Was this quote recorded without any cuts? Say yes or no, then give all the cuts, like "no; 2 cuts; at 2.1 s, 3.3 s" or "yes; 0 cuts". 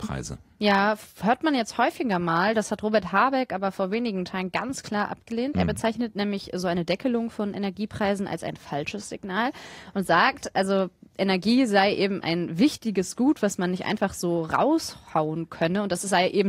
yes; 0 cuts